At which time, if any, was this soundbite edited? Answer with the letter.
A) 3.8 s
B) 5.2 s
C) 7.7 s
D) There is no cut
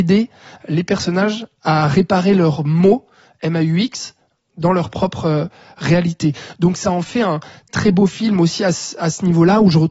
C